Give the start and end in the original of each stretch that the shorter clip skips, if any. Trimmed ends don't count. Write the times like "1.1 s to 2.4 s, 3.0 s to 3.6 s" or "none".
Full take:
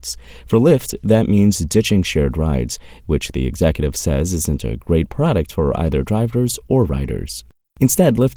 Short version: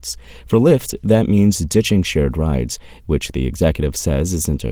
none